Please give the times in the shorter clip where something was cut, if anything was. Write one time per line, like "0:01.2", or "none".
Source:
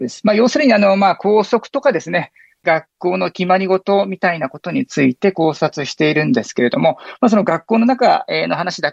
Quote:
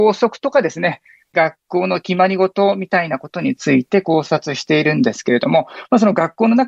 none